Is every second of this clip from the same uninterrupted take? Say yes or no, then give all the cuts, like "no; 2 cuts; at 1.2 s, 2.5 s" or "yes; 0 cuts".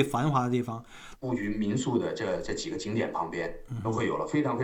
no; 1 cut; at 1.2 s